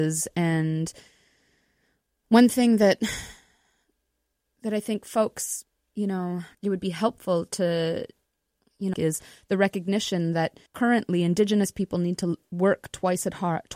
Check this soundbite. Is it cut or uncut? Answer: cut